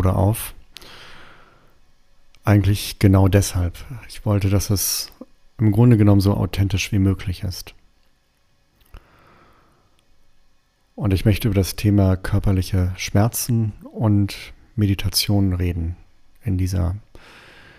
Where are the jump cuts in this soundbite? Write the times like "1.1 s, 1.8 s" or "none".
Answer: none